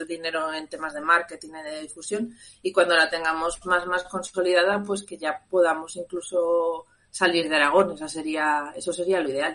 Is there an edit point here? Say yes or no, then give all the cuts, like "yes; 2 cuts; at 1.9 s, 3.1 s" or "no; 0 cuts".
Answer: no; 0 cuts